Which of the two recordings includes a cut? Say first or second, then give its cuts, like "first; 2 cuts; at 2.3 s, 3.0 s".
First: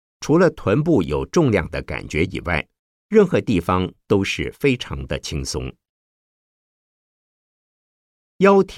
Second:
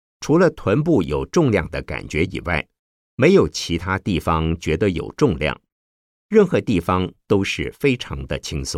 first; 1 cut; at 2.9 s